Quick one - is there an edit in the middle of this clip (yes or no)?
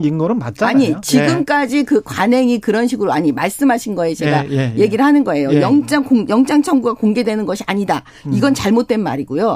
no